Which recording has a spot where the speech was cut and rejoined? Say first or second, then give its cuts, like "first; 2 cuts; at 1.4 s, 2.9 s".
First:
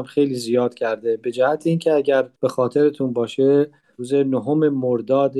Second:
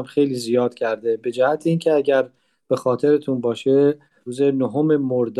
first; 1 cut; at 2.4 s